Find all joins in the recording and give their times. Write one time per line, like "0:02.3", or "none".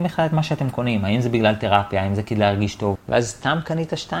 0:02.9